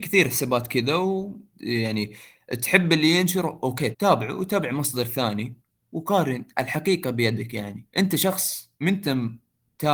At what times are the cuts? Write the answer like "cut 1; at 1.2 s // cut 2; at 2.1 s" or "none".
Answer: cut 1; at 1.5 s // cut 2; at 3.9 s // cut 3; at 7.9 s